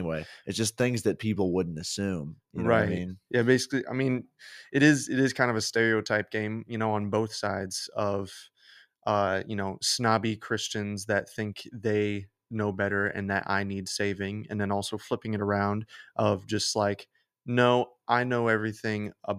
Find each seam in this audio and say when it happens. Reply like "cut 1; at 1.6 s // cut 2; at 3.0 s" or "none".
cut 1; at 3.3 s